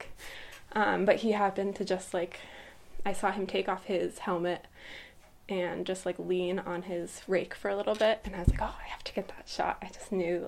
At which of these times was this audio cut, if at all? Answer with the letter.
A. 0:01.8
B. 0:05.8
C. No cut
C